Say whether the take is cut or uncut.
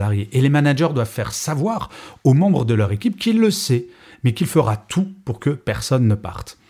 uncut